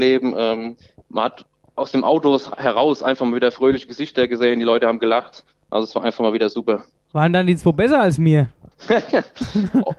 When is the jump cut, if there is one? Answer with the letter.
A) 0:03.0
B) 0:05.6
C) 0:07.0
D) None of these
D